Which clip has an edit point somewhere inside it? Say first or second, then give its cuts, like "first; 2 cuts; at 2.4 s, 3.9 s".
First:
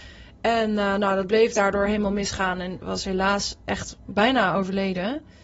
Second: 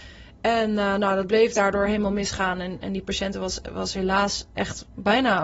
first; 1 cut; at 2.8 s